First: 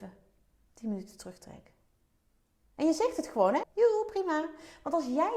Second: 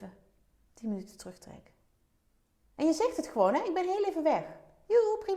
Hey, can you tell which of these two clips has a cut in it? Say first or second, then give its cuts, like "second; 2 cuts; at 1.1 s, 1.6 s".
first; 1 cut; at 3.6 s